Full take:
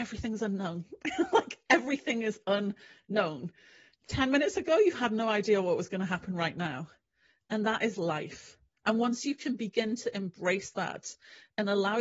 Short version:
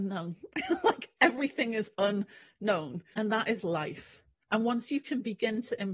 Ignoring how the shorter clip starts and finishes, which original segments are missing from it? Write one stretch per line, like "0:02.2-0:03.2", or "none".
0:03.6-0:07.5